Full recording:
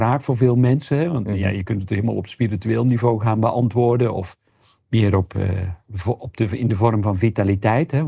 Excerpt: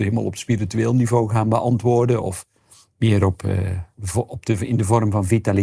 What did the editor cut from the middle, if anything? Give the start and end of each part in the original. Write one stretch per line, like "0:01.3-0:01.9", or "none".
none